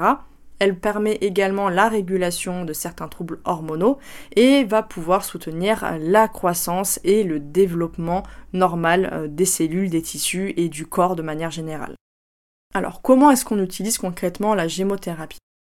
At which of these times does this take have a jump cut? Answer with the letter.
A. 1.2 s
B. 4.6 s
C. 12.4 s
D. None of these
D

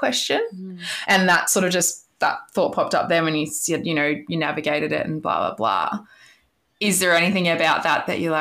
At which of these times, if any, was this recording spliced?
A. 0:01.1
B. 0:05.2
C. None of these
C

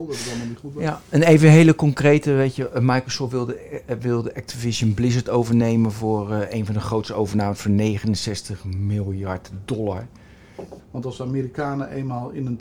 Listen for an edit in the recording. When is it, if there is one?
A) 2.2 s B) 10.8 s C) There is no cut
B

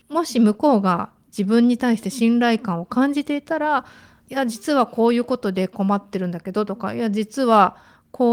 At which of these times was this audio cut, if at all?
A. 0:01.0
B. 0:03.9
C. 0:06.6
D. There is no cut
D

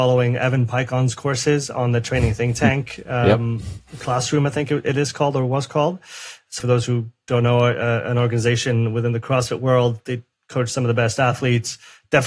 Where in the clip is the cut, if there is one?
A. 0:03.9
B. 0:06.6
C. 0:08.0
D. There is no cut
B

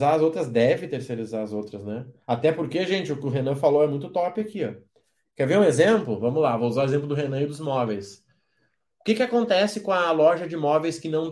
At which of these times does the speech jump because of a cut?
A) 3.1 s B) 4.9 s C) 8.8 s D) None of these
D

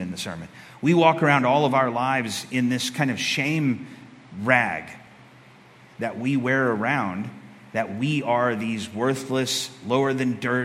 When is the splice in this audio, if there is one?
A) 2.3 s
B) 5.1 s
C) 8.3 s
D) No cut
D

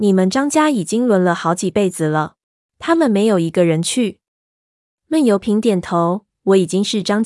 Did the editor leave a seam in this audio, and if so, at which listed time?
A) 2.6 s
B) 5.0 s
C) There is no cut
A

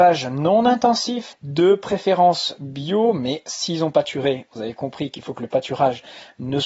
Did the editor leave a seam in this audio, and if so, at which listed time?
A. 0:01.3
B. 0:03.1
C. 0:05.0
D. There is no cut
A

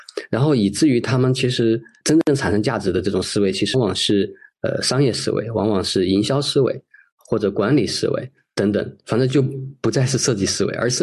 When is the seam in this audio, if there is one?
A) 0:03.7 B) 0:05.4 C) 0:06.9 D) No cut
A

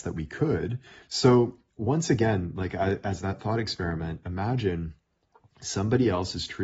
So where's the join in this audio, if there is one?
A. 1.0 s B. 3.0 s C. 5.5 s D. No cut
A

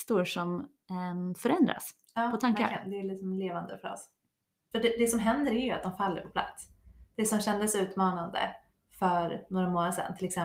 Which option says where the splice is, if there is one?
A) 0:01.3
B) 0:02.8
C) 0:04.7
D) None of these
C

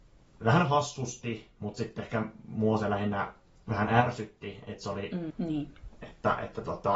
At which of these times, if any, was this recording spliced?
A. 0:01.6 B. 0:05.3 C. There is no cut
B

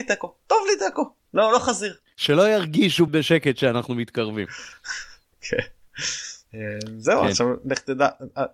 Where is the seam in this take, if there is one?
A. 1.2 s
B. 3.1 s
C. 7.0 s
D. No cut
B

